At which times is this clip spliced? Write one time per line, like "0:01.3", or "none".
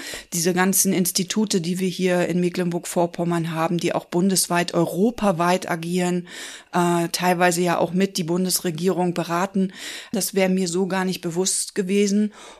0:10.1